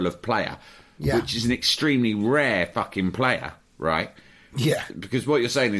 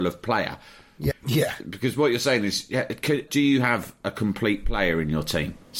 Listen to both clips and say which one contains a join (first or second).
second